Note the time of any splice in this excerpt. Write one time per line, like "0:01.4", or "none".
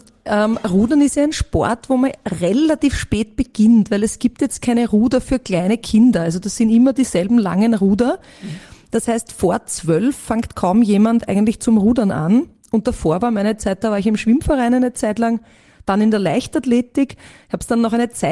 none